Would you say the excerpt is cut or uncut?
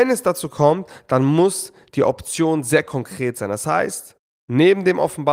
uncut